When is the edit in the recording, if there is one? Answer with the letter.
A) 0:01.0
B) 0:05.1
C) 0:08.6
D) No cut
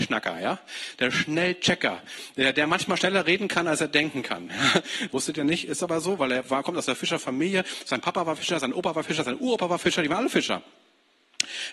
B